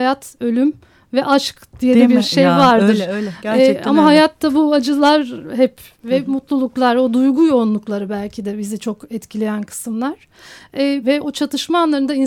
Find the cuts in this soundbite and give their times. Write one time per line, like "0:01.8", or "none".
0:11.0